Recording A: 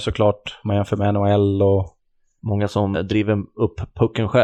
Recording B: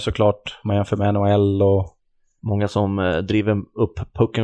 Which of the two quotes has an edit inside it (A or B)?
A